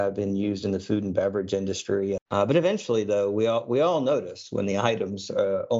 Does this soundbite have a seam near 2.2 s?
yes; 1 cut; at 2.2 s

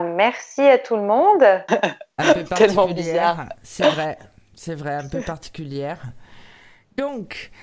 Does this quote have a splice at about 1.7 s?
yes; 1 cut; at 1.7 s

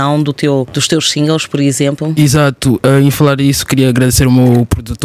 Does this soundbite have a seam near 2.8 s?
no; 0 cuts

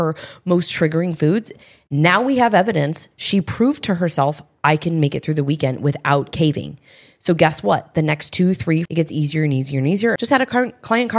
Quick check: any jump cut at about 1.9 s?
no; 2 cuts; at 8.9 s, 10.2 s

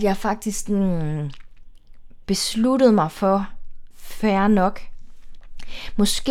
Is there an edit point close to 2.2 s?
no; 1 cut; at 3.9 s

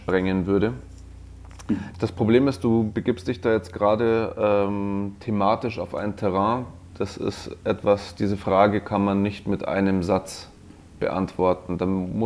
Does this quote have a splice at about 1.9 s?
yes; 1 cut; at 1.9 s

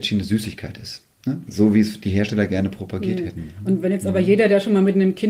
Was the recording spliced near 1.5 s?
yes; 1 cut; at 1.5 s

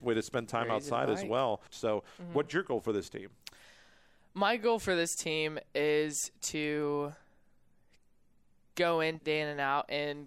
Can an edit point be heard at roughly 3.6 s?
no; 2 cuts; at 1.7 s, 9.2 s

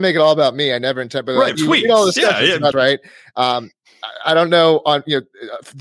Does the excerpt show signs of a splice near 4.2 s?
no; 2 cuts; at 1.5 s, 2.7 s

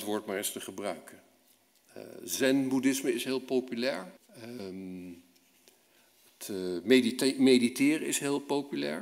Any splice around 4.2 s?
yes; 1 cut; at 4.2 s

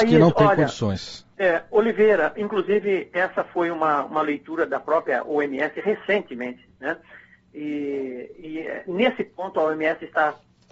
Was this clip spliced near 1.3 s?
yes; 1 cut; at 1.3 s

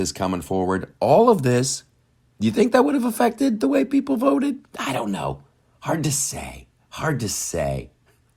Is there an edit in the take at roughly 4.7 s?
no; 0 cuts

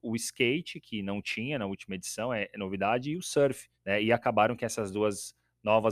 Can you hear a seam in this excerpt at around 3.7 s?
yes; 1 cut; at 3.7 s

